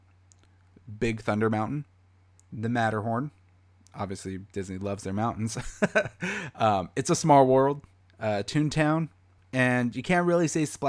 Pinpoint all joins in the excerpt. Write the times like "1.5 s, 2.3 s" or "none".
none